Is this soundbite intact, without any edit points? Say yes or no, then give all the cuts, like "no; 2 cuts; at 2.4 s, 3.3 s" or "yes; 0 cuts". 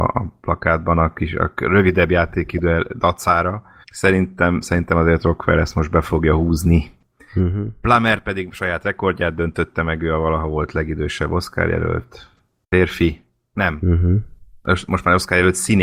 no; 1 cut; at 3.8 s